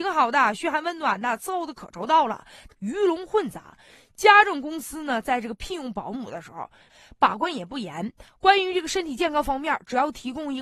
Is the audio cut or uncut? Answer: cut